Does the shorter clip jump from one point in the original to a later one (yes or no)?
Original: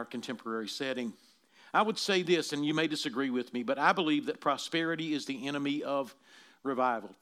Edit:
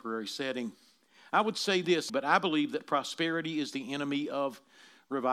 yes